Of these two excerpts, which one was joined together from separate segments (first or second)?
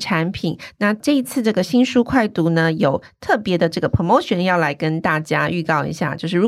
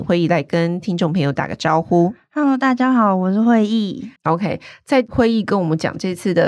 second